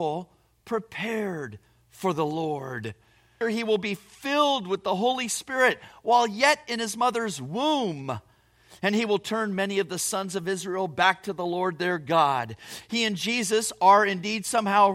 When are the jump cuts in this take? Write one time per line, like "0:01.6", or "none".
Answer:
0:03.4
0:12.8